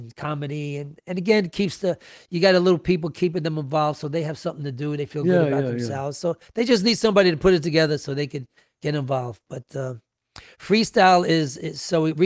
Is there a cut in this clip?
no; 0 cuts

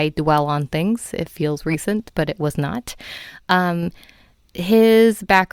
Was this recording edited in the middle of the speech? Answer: no; 0 cuts

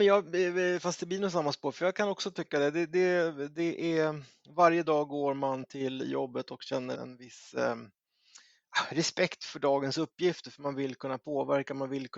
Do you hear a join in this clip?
yes; 1 cut; at 6.9 s

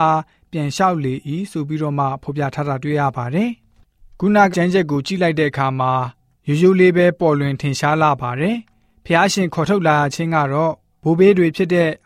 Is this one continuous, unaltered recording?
no; 1 cut; at 4.5 s

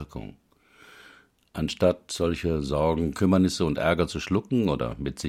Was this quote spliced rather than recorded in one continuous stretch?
no; 0 cuts

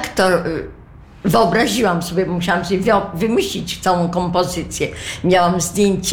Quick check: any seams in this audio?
no; 0 cuts

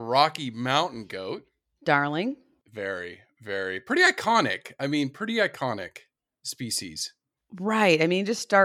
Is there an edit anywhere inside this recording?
no; 0 cuts

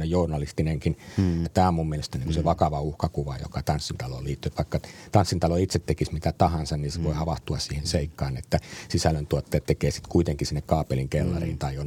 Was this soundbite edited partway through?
yes; 1 cut; at 1.5 s

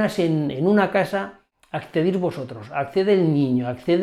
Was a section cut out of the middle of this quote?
no; 0 cuts

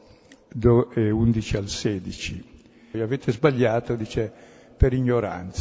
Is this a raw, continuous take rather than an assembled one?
no; 1 cut; at 2.9 s

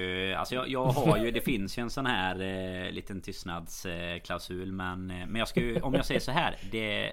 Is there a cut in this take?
no; 0 cuts

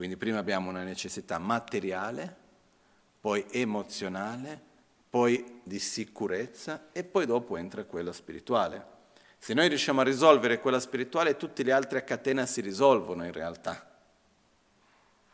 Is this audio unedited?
yes; 0 cuts

